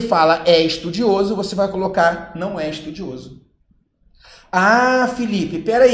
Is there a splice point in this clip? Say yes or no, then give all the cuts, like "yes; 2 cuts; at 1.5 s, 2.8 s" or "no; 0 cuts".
no; 0 cuts